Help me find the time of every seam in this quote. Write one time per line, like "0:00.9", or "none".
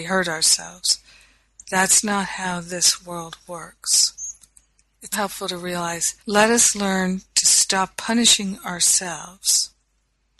0:05.1
0:06.2